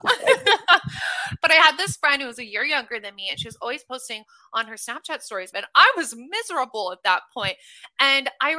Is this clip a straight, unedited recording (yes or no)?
no